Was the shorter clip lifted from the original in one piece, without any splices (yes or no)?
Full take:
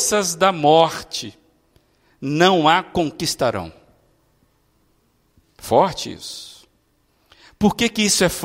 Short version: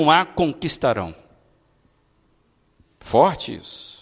yes